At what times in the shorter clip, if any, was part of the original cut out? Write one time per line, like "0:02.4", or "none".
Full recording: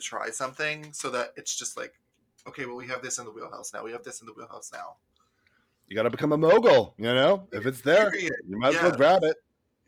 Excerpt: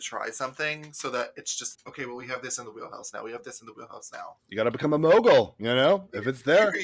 0:01.7
0:04.4